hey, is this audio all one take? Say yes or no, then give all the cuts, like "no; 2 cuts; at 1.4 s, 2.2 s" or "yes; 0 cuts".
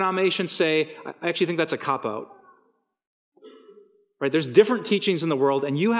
yes; 0 cuts